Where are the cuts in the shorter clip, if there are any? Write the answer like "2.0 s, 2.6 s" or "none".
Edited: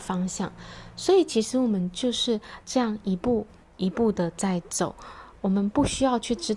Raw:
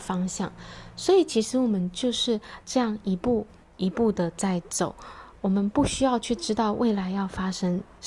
none